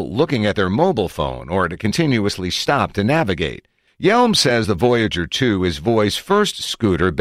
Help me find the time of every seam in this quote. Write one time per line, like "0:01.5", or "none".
0:03.9